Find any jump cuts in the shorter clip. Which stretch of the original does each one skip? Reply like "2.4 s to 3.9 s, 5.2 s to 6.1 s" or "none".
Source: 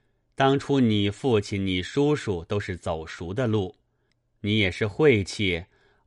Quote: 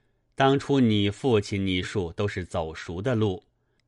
1.8 s to 2.1 s